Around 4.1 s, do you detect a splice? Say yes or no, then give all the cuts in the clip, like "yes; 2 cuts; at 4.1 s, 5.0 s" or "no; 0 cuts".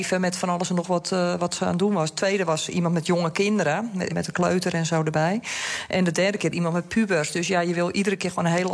yes; 1 cut; at 4.1 s